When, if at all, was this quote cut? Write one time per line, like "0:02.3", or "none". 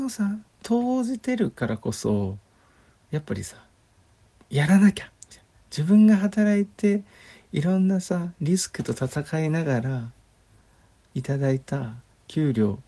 none